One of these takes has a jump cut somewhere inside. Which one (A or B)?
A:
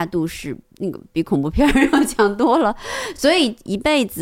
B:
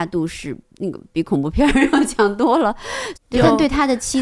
B